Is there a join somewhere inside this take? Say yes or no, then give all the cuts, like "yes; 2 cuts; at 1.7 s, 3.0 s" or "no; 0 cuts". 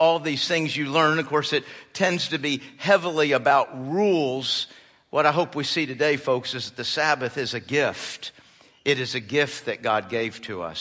no; 0 cuts